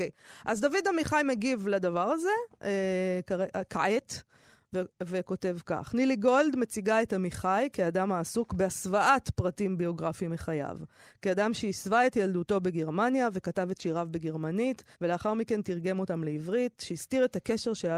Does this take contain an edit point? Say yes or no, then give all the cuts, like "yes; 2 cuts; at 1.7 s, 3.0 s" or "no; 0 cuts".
yes; 1 cut; at 14.9 s